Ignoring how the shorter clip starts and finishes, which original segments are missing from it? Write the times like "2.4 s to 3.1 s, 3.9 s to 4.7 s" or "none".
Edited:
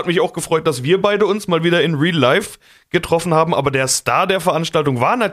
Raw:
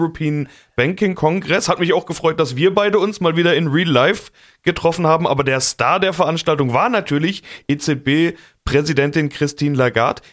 none